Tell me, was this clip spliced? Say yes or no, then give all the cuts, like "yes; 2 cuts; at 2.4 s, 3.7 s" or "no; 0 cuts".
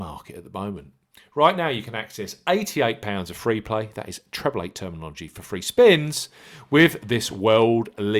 no; 0 cuts